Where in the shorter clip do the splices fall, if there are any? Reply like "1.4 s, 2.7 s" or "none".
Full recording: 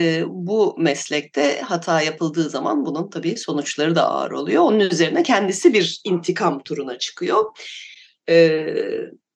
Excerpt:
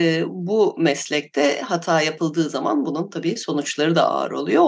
none